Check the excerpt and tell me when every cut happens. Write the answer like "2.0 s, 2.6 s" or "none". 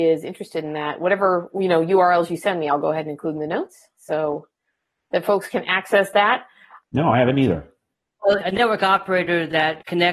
6.8 s, 8.4 s

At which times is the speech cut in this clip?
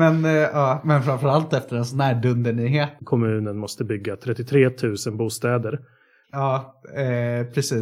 3.0 s, 6.2 s

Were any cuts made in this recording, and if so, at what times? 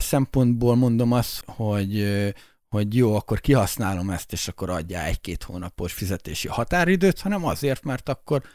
1.4 s

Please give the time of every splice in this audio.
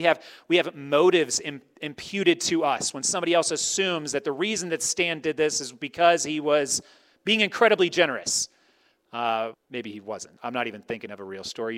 9.5 s

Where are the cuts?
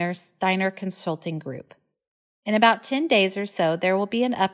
none

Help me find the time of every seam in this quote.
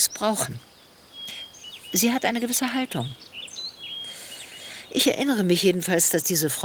none

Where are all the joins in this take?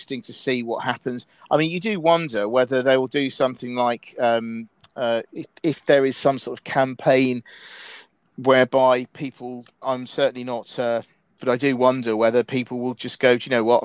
5.3 s, 9.8 s, 11.4 s

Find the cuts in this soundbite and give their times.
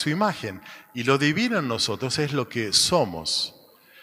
none

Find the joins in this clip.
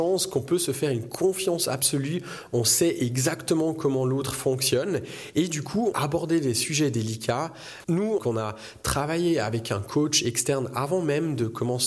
5.9 s, 8.2 s

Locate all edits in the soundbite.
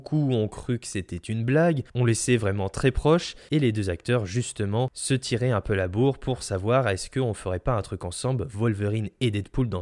none

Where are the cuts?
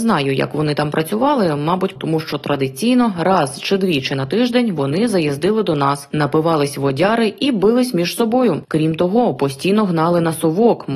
2.0 s, 8.6 s

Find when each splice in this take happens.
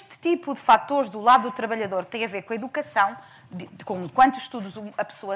none

